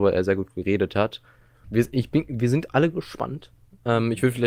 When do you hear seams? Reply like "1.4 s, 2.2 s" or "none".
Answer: 1.6 s